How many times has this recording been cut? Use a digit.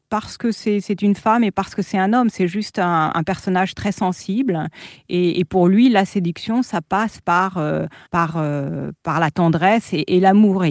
1